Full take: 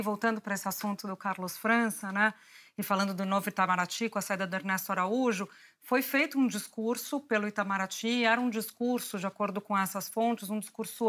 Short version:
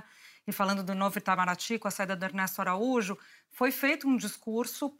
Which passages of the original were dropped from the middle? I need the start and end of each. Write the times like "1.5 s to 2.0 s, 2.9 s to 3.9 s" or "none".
none